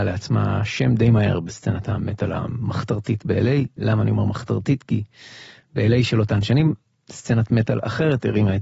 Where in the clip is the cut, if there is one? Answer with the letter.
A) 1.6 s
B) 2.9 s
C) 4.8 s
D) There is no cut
D